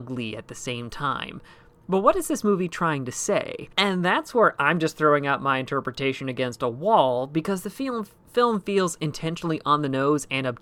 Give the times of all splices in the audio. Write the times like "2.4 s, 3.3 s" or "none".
3.7 s